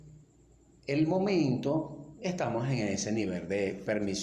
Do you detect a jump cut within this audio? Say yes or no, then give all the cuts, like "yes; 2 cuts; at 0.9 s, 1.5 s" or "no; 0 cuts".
yes; 1 cut; at 2.2 s